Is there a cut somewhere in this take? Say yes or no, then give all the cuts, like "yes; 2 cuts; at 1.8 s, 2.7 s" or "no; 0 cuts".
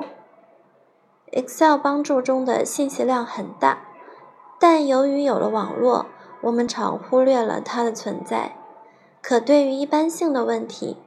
yes; 1 cut; at 6.7 s